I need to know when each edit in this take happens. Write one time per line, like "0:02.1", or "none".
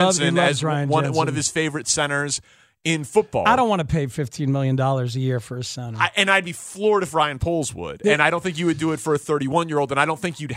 none